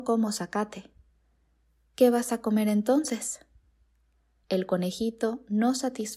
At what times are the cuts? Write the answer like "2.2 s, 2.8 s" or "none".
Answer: 4.4 s